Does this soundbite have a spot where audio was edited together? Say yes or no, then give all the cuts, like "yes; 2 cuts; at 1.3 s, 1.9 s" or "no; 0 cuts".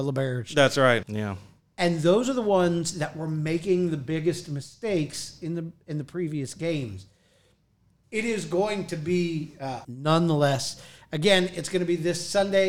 yes; 3 cuts; at 1.0 s, 8.0 s, 9.8 s